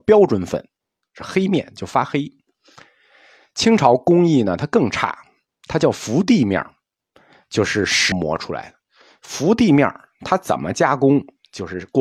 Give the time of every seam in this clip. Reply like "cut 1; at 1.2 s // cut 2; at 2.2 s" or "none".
cut 1; at 8.1 s